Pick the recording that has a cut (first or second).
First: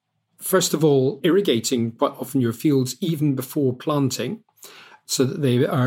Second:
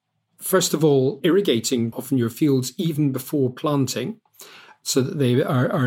second